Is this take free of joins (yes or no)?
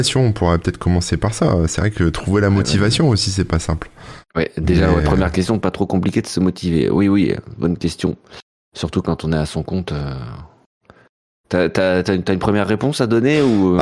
yes